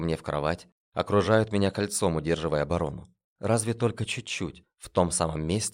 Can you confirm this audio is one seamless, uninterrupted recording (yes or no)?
no